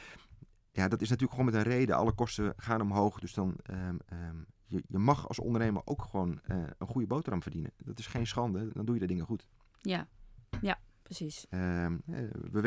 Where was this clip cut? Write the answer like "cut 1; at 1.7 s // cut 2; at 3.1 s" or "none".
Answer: cut 1; at 8.7 s // cut 2; at 11.5 s